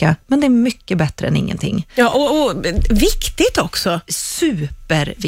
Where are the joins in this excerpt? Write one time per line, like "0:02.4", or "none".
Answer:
none